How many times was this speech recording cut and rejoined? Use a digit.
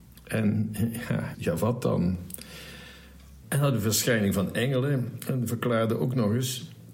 2